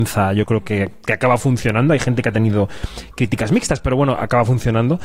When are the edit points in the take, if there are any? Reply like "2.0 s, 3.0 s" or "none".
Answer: none